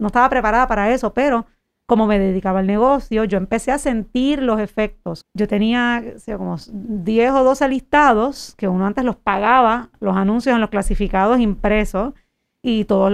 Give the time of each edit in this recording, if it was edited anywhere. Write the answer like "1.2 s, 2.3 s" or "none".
5.2 s